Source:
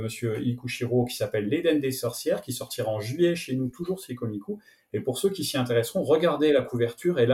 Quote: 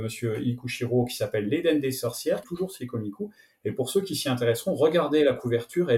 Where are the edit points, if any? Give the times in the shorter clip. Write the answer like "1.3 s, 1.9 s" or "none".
2.4 s